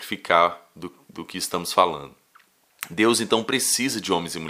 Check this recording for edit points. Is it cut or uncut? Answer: uncut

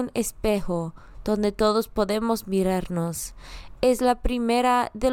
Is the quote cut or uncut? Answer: uncut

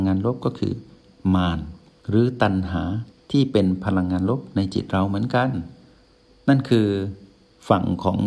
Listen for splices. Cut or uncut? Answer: uncut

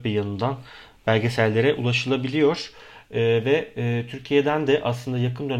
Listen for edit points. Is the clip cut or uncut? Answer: uncut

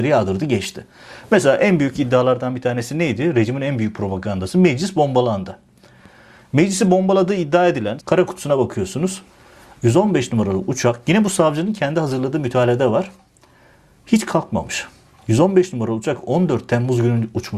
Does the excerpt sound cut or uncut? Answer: cut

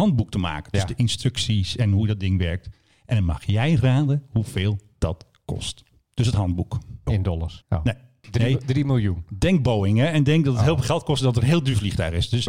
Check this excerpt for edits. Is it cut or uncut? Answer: cut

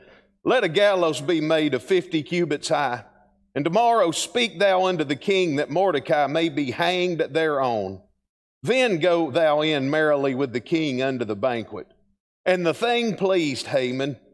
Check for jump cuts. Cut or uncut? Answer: uncut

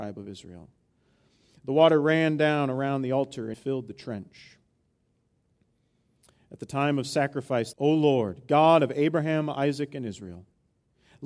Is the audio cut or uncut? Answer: cut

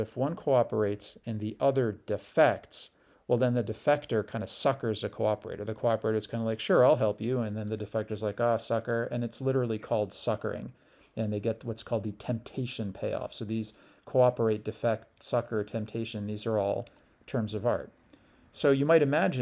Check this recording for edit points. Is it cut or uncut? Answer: uncut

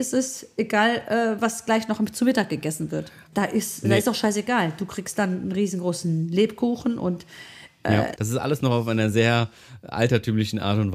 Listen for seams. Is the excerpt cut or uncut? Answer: cut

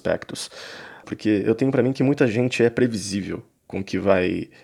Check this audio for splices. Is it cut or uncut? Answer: cut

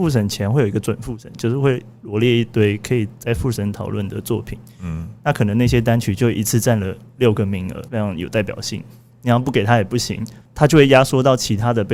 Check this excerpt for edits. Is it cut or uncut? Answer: cut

